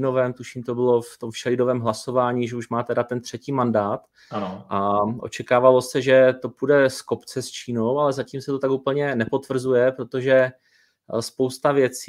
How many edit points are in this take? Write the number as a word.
zero